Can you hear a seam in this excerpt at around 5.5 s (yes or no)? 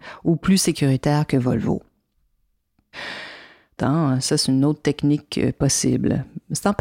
no